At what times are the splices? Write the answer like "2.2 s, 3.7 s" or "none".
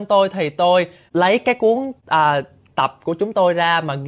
none